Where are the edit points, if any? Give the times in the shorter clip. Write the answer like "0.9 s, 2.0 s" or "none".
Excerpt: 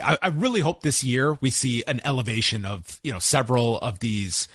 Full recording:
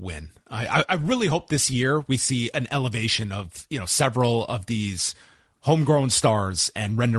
none